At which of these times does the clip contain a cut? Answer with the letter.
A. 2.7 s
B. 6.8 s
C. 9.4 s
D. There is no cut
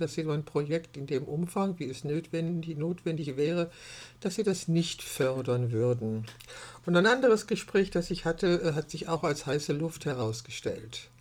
D